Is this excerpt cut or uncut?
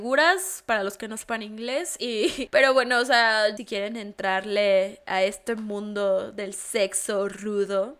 cut